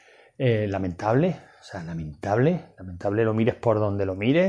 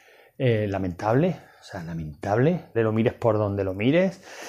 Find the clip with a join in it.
second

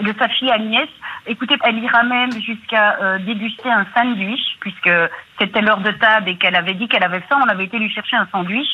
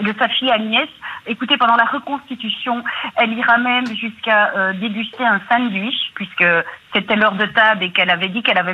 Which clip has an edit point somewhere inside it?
first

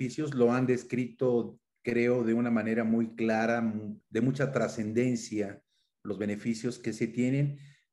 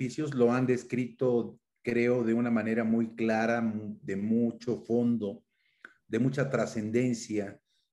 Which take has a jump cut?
first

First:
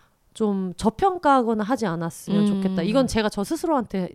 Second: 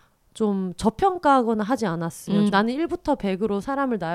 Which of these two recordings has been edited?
second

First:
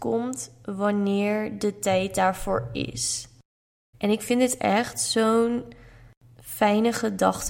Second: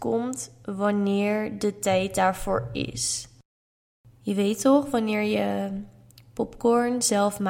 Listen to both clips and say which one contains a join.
first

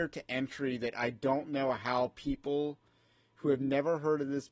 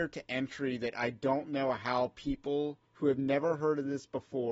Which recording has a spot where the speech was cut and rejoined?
second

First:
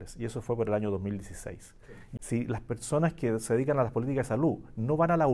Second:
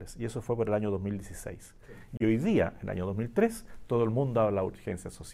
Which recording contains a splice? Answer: first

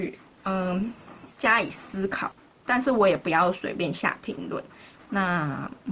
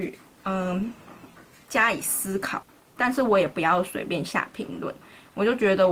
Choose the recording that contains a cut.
first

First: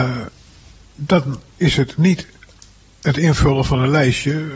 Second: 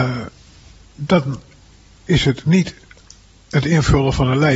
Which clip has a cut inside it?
first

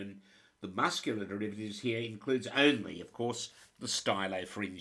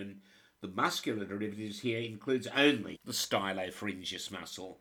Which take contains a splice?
second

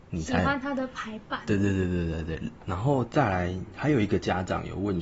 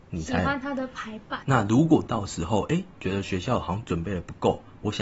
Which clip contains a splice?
second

